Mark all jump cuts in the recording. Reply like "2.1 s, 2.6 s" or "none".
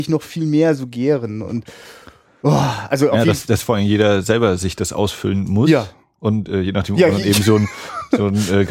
none